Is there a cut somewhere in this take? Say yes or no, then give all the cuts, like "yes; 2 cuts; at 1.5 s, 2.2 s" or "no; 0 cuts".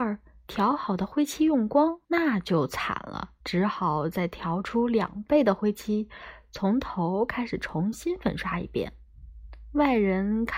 yes; 2 cuts; at 2.0 s, 3.4 s